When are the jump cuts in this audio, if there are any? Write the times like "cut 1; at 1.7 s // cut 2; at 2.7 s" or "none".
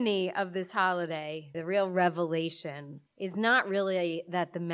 cut 1; at 1.5 s // cut 2; at 3.1 s